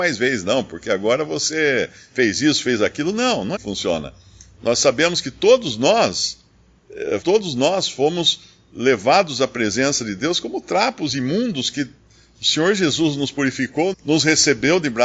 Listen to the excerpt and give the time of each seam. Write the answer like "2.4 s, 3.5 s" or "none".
3.6 s, 7.2 s, 13.9 s